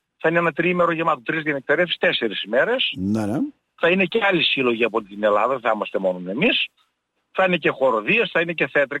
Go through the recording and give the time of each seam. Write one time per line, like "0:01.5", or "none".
none